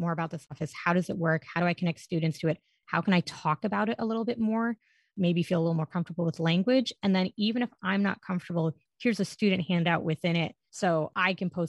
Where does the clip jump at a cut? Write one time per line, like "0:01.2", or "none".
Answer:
none